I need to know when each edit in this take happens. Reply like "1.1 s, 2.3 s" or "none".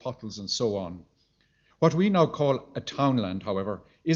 1.7 s